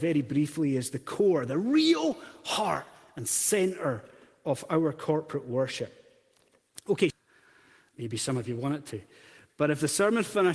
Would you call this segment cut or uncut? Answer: cut